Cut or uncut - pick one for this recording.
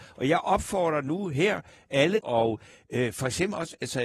cut